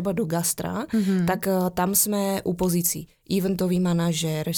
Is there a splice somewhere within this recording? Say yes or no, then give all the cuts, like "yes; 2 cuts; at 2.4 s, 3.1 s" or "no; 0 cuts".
no; 0 cuts